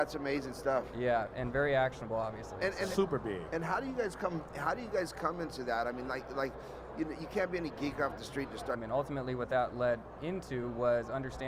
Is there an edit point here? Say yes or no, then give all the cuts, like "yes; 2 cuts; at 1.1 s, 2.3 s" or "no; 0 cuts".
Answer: yes; 1 cut; at 8.7 s